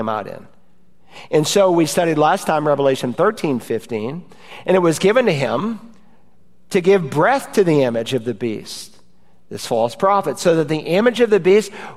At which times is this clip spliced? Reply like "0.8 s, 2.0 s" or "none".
none